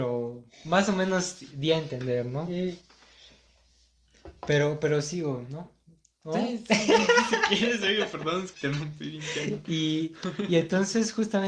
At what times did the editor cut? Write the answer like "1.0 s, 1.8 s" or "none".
8.5 s